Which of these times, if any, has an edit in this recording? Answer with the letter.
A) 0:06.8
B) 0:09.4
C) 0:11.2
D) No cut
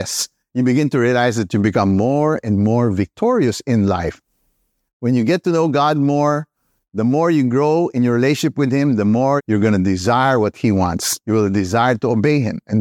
B